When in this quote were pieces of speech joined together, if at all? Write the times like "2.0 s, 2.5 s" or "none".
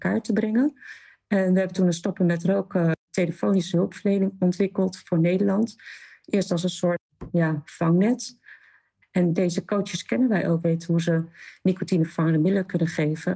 9.0 s, 10.6 s